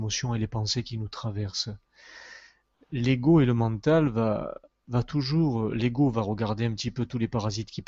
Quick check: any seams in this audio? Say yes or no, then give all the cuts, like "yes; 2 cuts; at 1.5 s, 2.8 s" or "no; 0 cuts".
no; 0 cuts